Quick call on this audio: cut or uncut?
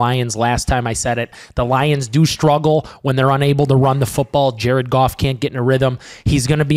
uncut